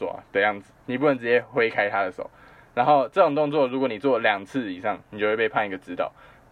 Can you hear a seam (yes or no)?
no